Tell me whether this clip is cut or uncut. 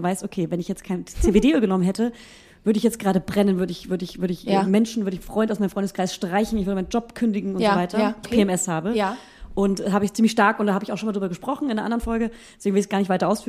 cut